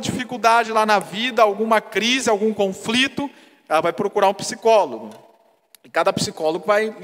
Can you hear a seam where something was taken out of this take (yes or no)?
no